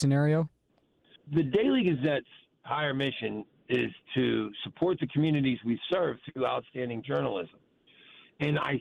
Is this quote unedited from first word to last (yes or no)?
no